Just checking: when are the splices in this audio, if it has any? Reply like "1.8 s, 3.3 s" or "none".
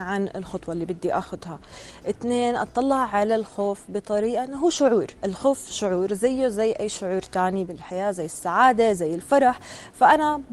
5.2 s